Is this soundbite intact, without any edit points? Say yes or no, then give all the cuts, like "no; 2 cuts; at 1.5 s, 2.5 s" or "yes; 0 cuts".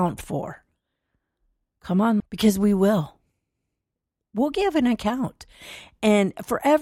no; 1 cut; at 2.2 s